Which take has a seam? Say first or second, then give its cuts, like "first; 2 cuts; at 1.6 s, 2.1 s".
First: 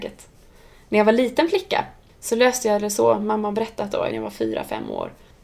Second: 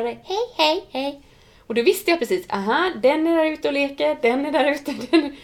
first; 1 cut; at 4.1 s